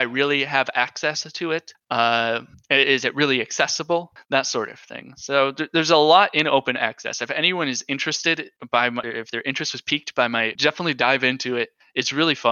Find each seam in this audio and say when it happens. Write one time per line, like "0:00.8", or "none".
0:09.0
0:10.6